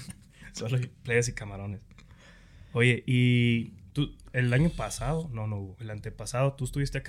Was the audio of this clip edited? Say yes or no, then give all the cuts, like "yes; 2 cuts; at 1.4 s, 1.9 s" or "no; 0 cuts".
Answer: no; 0 cuts